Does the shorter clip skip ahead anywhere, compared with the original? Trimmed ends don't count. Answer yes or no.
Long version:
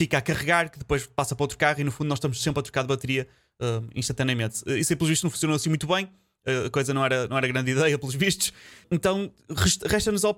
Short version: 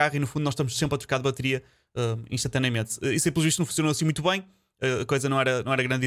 no